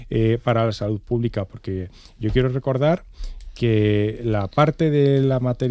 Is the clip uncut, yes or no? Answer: yes